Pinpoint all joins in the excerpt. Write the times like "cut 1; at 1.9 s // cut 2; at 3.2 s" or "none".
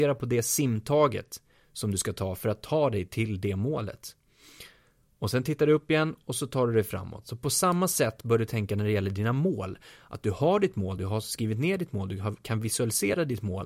none